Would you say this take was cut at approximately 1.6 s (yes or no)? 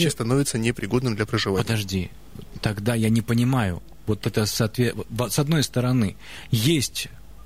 no